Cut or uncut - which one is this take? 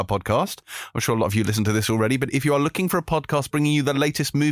uncut